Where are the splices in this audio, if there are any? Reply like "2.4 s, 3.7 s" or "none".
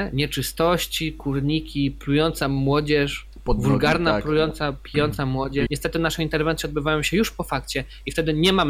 5.7 s